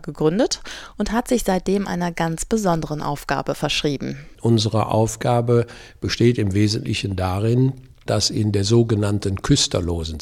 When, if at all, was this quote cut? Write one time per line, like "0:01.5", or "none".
0:04.3
0:08.1